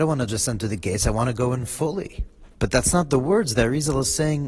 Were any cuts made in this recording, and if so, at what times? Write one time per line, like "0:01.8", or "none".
0:02.5